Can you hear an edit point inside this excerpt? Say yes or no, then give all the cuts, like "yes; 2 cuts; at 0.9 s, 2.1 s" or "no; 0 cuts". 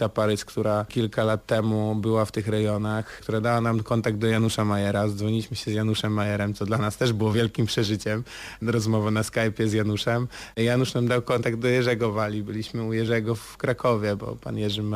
no; 0 cuts